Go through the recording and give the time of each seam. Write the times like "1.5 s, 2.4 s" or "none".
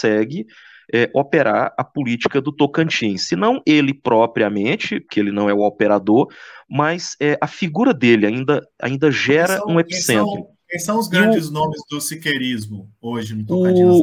none